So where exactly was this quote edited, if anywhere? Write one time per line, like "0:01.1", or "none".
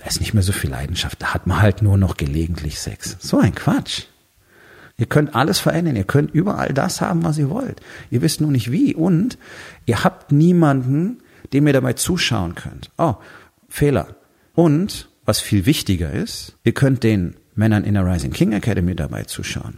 0:04.9
0:14.5
0:16.6